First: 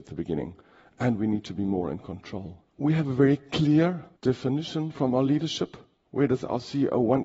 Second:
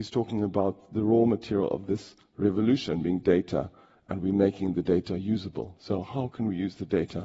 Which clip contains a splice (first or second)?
first